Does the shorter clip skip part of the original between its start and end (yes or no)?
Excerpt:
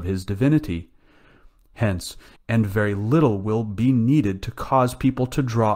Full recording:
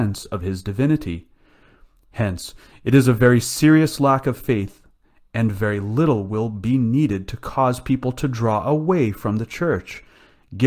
yes